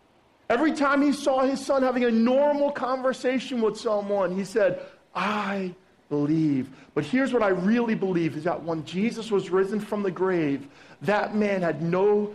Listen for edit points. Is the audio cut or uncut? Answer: uncut